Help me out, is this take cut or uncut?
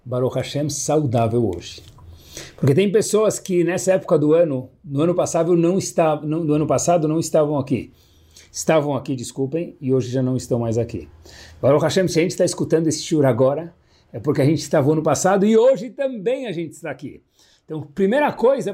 uncut